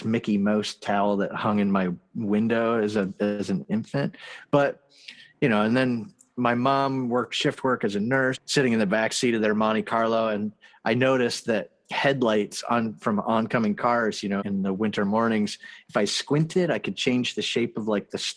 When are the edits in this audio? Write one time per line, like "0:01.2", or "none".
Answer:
0:08.3
0:14.4

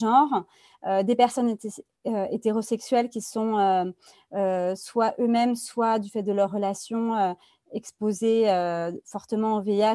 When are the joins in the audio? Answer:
none

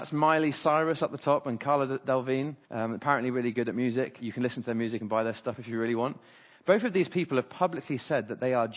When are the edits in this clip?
0:02.6
0:04.2

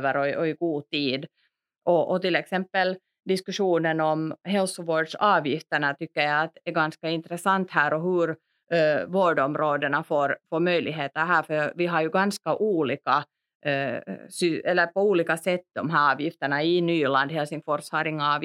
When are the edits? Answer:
none

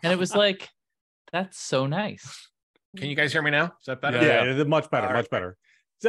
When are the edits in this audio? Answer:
0:02.9

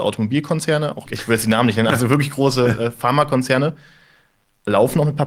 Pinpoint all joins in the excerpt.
0:01.1

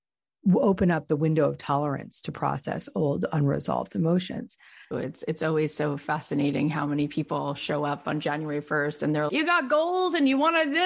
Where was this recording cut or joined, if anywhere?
0:04.9
0:09.3

